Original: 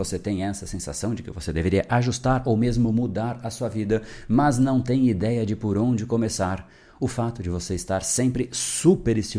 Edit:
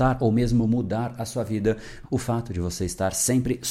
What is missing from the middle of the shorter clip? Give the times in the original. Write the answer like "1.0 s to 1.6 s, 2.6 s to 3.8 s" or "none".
4.3 s to 6.9 s